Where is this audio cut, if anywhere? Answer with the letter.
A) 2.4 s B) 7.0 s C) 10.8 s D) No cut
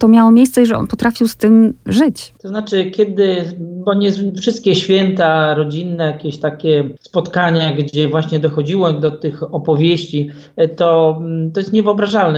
B